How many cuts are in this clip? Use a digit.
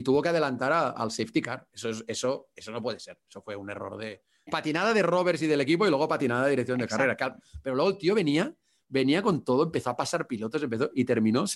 1